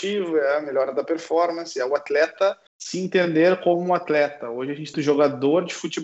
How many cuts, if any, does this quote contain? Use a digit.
2